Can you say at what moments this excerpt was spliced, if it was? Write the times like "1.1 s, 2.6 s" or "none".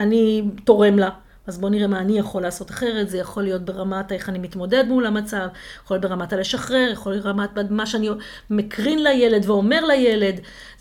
none